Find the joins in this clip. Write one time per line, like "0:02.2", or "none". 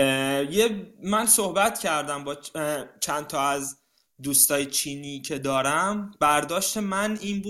none